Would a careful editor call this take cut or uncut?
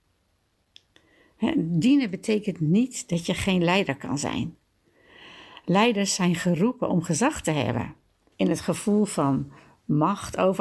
cut